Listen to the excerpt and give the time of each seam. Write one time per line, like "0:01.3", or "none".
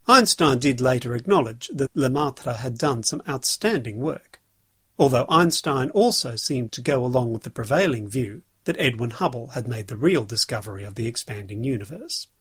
none